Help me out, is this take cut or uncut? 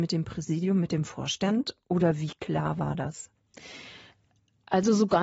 uncut